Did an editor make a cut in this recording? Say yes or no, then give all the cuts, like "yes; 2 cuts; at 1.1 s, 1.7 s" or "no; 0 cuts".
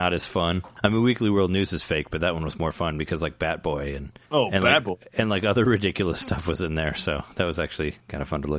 no; 0 cuts